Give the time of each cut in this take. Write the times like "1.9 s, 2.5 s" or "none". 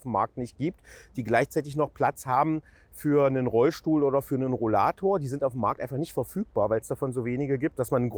none